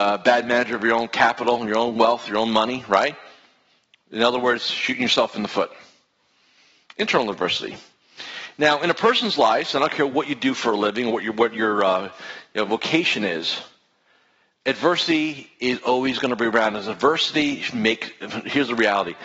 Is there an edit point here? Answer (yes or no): no